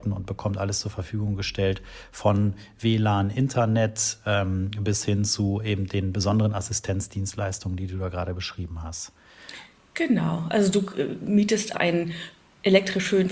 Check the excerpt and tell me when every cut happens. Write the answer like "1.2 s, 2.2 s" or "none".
11.7 s